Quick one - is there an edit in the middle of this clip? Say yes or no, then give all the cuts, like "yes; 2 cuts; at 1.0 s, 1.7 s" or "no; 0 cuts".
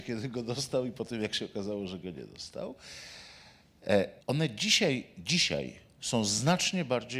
yes; 1 cut; at 4.2 s